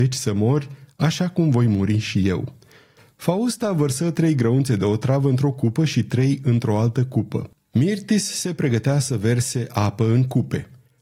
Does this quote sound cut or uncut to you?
uncut